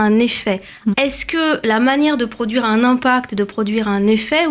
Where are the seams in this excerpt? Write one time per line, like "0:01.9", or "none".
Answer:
0:00.9